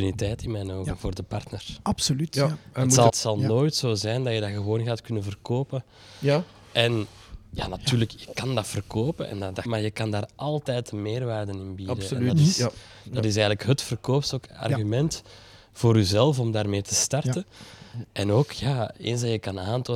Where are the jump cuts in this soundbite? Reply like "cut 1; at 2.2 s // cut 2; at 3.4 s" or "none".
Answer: cut 1; at 3.1 s // cut 2; at 9.7 s